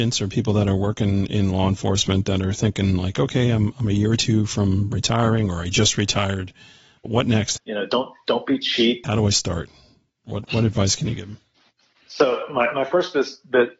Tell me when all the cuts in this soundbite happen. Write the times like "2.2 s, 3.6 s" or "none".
7.6 s, 9.0 s